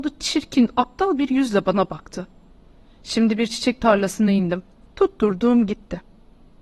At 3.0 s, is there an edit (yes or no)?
no